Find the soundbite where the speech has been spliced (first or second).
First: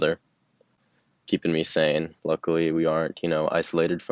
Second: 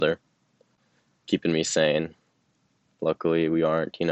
first